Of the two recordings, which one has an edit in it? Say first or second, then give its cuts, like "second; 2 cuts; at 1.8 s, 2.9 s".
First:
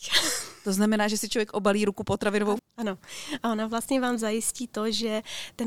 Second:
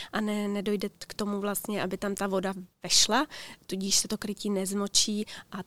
first; 1 cut; at 2.6 s